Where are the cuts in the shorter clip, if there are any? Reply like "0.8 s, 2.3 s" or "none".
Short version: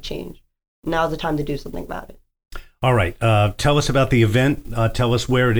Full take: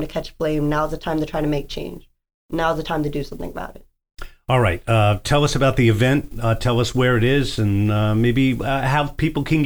none